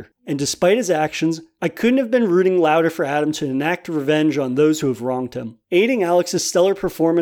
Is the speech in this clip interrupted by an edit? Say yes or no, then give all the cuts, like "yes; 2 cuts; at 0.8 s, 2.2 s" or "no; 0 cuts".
no; 0 cuts